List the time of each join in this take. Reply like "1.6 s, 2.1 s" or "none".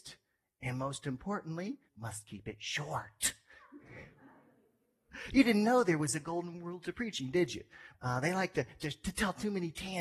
1.9 s, 7.9 s